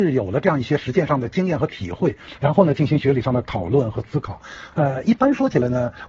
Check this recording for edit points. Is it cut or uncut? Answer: cut